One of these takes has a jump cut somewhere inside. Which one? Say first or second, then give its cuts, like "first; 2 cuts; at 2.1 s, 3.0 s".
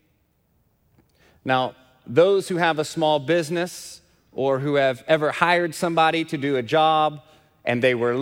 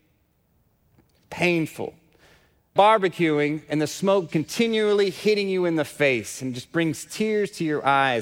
second; 3 cuts; at 1.2 s, 2.8 s, 4.3 s